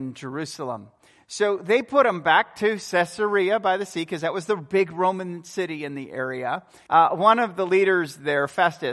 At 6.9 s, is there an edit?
yes; 1 cut; at 6.9 s

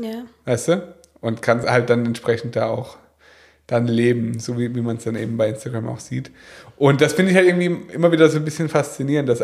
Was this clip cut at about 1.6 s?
no; 0 cuts

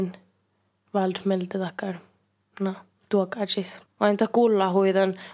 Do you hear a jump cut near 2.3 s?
no; 1 cut; at 3.9 s

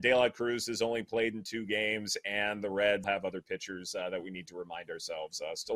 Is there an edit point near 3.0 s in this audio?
yes; 1 cut; at 3.0 s

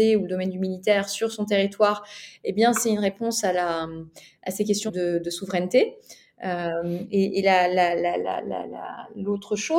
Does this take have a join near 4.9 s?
yes; 1 cut; at 4.9 s

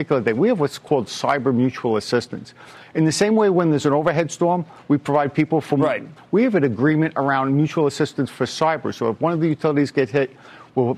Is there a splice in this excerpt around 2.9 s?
no; 1 cut; at 6.2 s

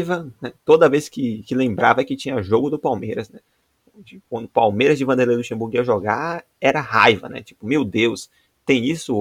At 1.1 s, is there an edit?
no; 0 cuts

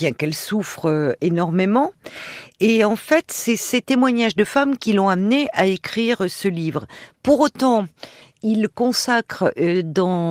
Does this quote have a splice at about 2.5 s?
no; 0 cuts

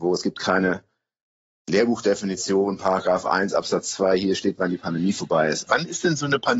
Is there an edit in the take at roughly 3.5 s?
no; 1 cut; at 5.7 s

